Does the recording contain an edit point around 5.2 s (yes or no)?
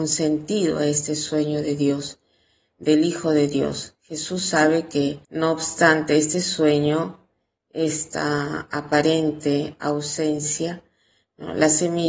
yes